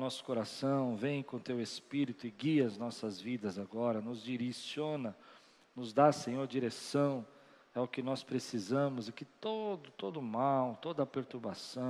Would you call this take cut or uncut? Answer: uncut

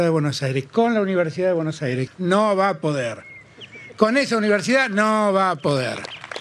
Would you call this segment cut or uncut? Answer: cut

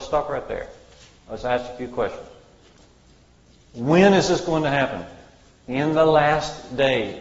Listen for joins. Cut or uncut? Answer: uncut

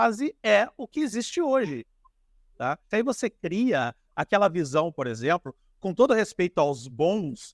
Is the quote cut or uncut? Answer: cut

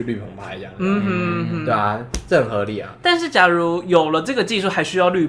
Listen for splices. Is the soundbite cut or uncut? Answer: uncut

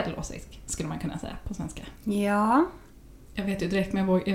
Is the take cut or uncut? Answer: cut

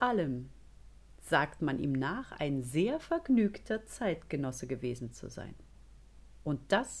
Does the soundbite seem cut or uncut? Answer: uncut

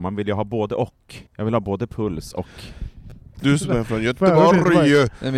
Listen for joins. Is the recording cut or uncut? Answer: cut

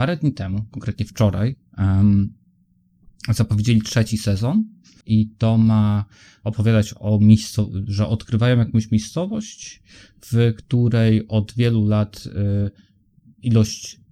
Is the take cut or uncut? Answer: cut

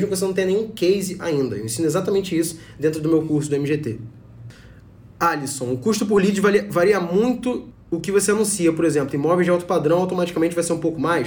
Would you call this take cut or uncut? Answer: uncut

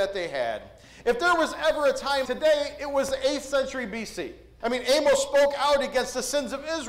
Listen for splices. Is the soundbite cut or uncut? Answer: cut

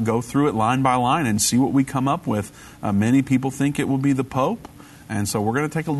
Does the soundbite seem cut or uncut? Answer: uncut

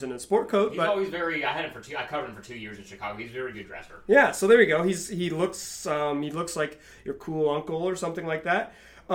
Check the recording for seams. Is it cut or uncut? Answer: uncut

